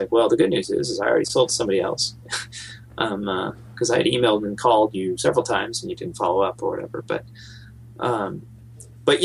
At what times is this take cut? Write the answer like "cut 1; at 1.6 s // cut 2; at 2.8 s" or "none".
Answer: none